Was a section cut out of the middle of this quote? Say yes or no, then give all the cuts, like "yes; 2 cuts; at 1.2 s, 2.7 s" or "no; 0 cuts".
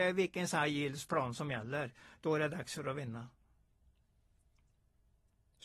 no; 0 cuts